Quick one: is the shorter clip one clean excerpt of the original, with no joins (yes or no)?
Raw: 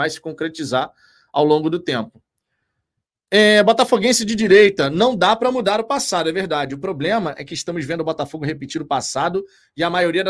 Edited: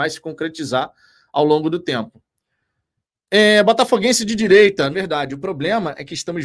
no